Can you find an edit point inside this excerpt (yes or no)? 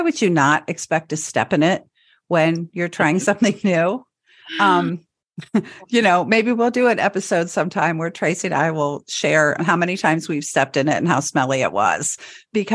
yes